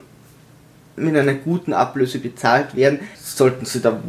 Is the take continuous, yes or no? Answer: no